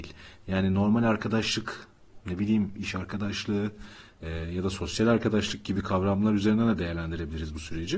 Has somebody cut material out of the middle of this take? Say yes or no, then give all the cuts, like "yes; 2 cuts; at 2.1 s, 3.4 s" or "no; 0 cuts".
no; 0 cuts